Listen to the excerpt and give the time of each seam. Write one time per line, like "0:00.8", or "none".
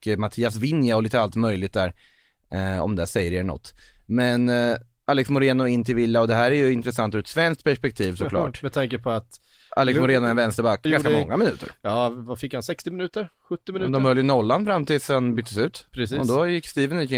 0:10.9